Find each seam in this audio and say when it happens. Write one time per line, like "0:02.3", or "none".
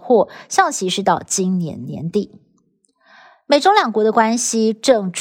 none

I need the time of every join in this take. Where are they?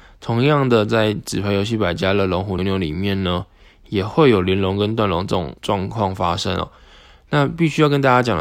0:02.6
0:05.6

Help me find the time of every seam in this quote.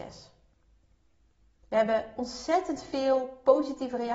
none

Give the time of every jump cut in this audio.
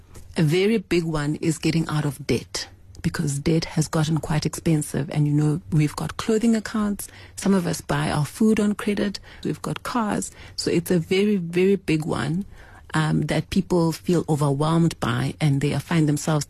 0:09.4

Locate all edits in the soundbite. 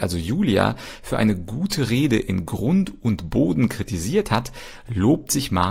none

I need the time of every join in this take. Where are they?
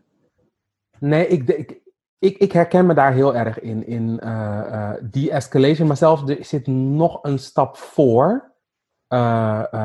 none

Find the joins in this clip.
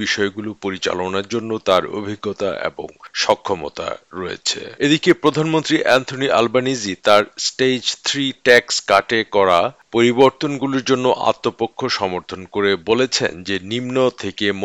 0:04.8

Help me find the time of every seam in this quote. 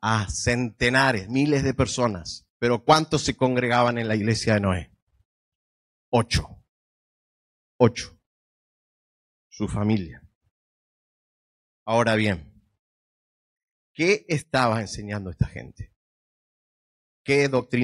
0:02.5

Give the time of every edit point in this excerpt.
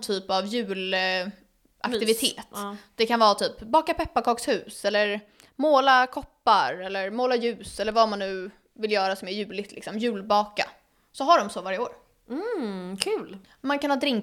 none

